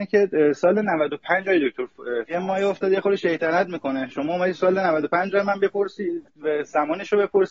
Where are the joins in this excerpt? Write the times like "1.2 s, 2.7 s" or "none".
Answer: 2.3 s